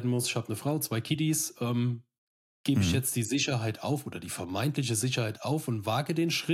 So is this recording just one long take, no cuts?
yes; 0 cuts

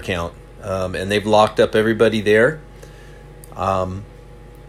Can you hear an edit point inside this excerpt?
no; 0 cuts

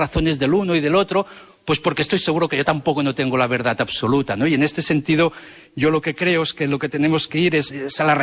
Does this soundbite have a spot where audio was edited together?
no; 0 cuts

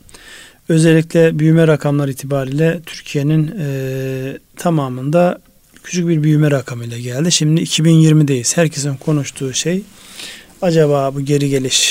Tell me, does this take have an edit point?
yes; 1 cut; at 4.5 s

